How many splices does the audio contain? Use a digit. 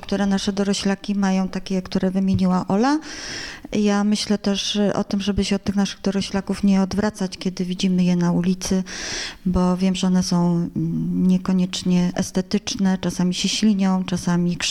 0